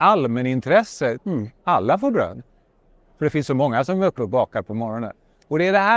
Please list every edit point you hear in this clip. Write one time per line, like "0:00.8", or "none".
0:01.2